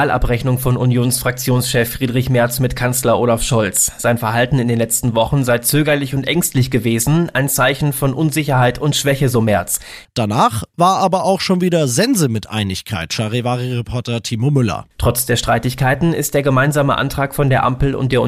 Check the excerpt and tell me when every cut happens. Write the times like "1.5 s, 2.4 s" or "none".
10.0 s, 14.9 s